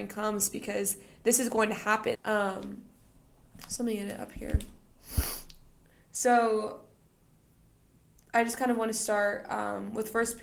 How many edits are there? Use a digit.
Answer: 1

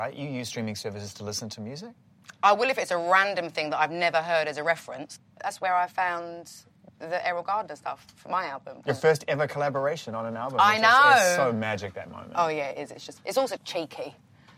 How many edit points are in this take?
1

